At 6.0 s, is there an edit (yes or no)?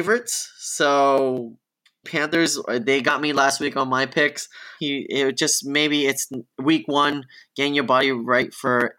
no